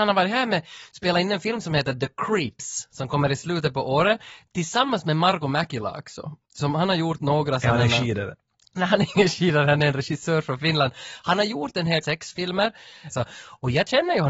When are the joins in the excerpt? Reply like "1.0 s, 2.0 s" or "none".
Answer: 12.0 s, 13.1 s